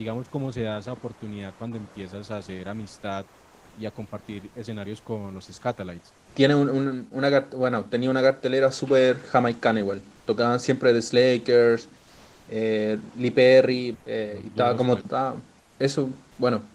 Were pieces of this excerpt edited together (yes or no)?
yes